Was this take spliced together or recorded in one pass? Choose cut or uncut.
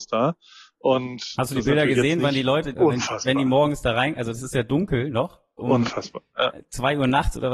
cut